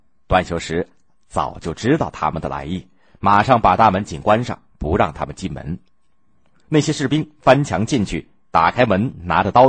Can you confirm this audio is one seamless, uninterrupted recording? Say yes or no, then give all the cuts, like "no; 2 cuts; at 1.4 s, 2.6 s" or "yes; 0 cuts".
no; 1 cut; at 4.1 s